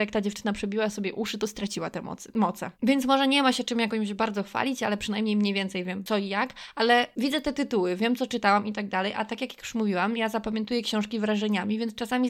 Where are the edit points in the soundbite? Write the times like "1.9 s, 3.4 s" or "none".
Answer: 2.7 s